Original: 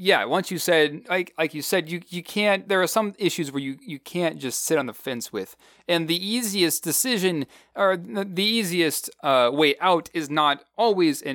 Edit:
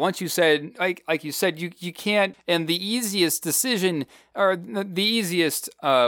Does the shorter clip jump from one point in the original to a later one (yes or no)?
yes